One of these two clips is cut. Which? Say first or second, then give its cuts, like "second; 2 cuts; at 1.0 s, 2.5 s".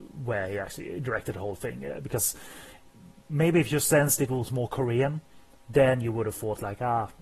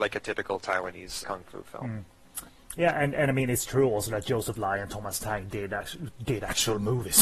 second; 1 cut; at 1.2 s